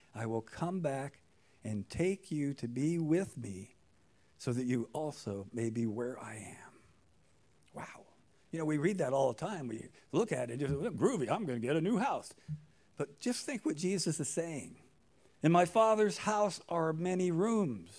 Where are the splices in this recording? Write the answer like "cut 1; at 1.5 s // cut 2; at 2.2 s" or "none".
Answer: cut 1; at 15.3 s